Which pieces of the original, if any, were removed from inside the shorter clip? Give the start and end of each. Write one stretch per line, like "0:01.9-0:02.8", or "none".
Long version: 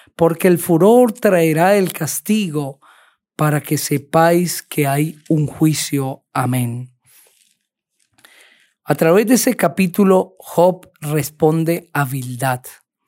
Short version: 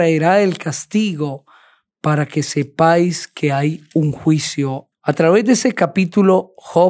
0:06.3-0:08.7